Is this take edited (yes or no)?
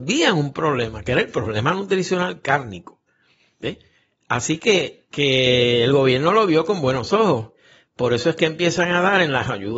no